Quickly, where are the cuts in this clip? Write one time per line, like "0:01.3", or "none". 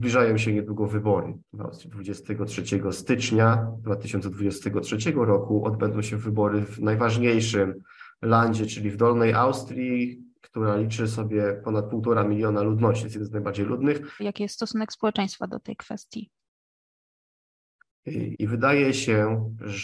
0:01.4
0:14.2
0:18.3